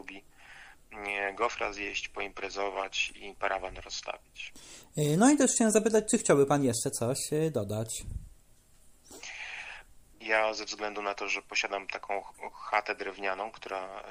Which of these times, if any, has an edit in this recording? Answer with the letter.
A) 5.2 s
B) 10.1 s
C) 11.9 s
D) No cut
B